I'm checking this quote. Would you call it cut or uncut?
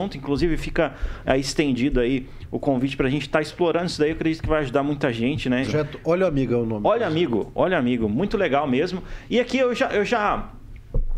cut